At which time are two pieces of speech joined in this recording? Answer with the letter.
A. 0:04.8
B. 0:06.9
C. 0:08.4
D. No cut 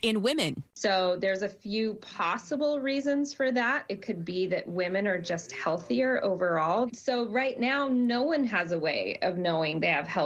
B